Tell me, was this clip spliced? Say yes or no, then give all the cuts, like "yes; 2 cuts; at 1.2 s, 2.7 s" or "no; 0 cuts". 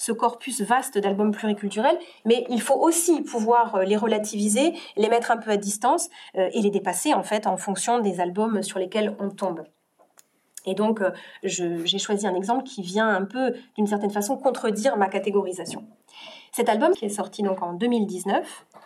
yes; 1 cut; at 16.9 s